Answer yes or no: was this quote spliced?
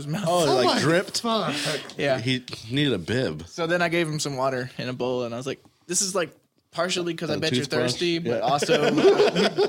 no